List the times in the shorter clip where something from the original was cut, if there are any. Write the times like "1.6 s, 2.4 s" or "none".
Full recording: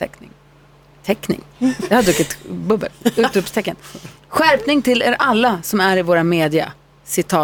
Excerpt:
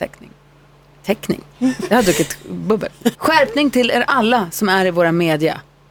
3.1 s